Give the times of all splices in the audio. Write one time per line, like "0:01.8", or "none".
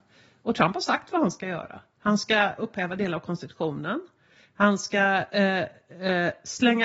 0:02.6